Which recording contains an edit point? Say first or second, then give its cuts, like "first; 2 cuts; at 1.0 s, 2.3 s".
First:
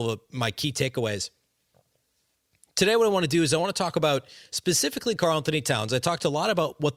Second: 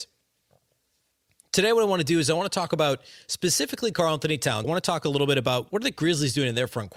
second; 2 cuts; at 4.6 s, 5.7 s